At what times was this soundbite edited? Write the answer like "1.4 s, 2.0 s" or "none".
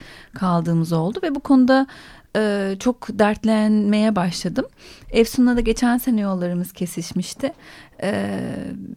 none